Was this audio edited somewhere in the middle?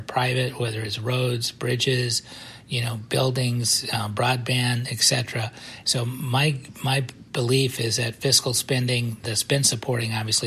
yes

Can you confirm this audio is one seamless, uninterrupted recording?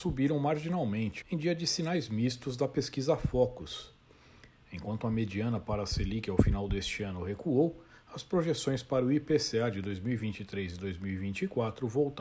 no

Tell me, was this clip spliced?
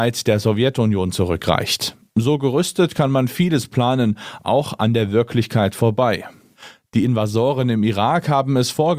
no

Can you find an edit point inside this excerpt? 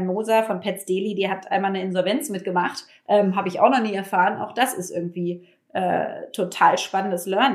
no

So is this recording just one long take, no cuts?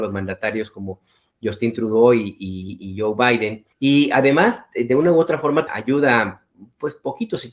no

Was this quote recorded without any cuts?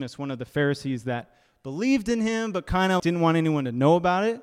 no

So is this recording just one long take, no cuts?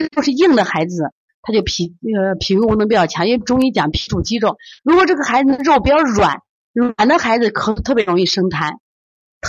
yes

